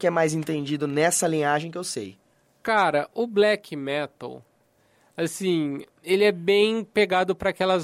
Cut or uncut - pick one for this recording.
uncut